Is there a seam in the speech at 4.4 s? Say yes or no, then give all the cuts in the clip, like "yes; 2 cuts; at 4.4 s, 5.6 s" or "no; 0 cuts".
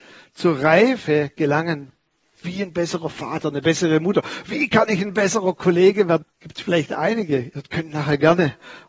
no; 2 cuts; at 2.4 s, 6.2 s